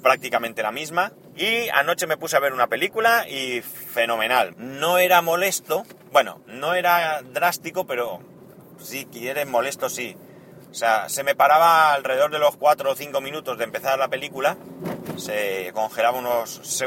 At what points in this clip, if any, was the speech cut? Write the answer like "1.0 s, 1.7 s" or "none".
1.3 s, 4.5 s

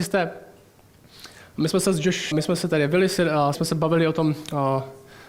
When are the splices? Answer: 2.3 s, 3.5 s

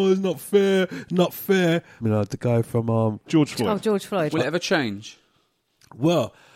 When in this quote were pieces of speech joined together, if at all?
2.0 s, 4.3 s

